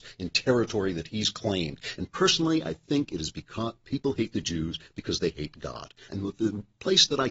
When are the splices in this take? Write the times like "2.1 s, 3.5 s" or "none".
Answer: 2.0 s, 6.1 s

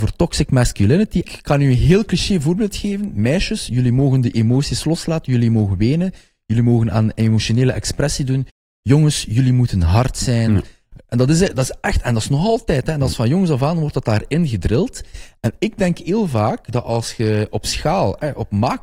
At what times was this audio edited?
1.2 s

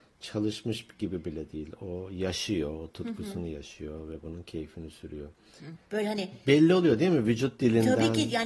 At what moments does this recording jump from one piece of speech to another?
5.7 s

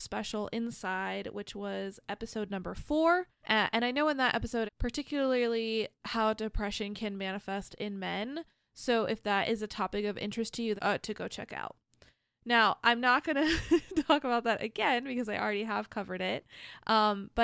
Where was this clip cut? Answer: 3.4 s, 4.7 s, 10.8 s

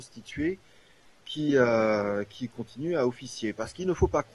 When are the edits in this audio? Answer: none

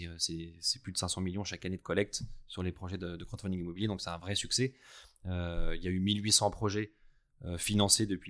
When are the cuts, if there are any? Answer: none

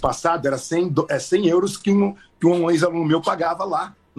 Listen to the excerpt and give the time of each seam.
none

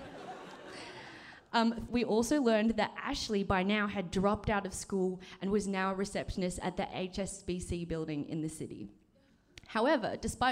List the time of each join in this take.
1.9 s

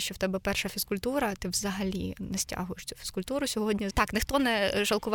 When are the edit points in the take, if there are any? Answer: 3.9 s

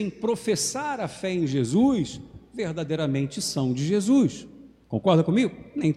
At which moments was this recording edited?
none

